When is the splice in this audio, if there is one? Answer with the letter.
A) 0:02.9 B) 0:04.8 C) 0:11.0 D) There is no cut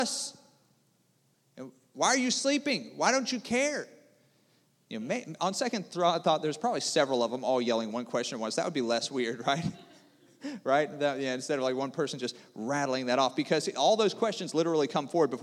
D